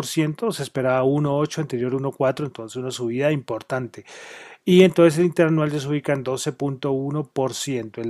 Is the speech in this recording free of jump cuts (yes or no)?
yes